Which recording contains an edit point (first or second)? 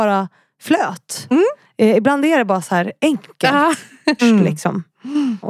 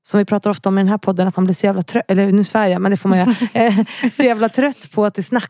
first